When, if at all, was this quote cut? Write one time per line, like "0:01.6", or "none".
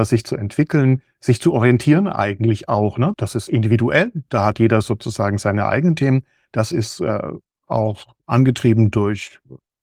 0:03.1